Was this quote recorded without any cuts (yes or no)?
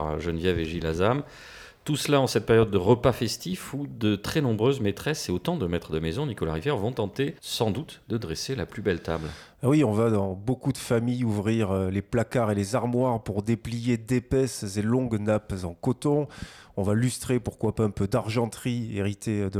no